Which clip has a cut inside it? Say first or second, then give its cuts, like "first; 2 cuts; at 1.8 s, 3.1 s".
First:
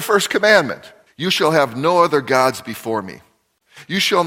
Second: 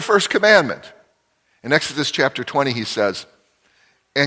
first; 1 cut; at 1.1 s